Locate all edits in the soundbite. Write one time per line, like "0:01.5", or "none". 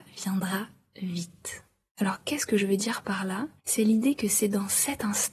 0:01.9
0:03.6